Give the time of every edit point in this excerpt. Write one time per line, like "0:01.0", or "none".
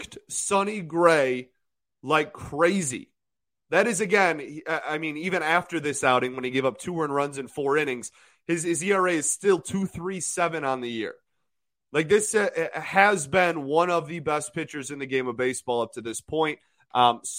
none

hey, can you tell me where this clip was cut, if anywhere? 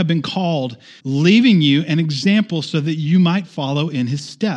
0:01.0

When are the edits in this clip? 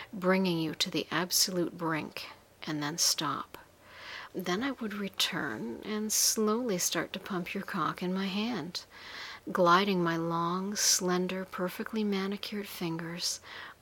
0:04.3

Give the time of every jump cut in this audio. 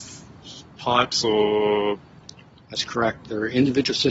none

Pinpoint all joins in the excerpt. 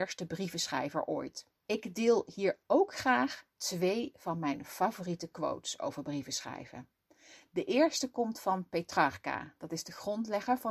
0:01.6
0:03.5

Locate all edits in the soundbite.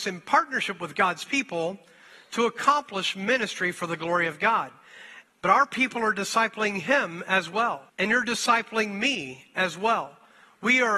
0:05.2
0:07.9

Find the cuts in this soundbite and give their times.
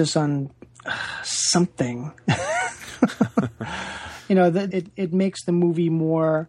0:04.7

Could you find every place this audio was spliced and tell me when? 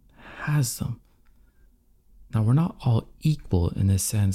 none

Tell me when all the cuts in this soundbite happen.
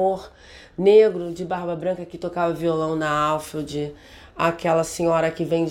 none

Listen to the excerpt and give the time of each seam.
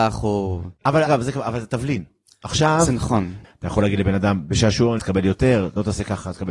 0:01.1
0:03.4
0:05.0

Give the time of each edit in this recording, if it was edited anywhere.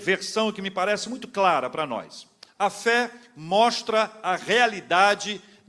none

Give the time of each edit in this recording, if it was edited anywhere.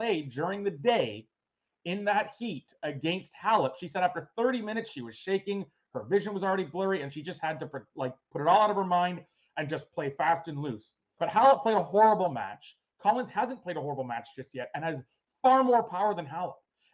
0:11.2

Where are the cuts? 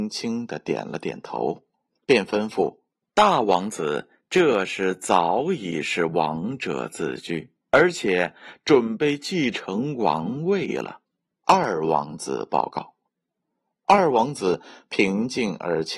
0:03.0
0:07.7
0:11.4

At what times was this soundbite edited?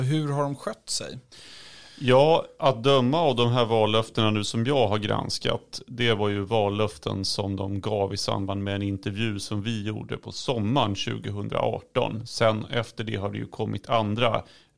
none

